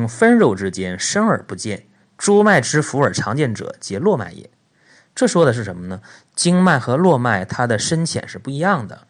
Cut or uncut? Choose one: uncut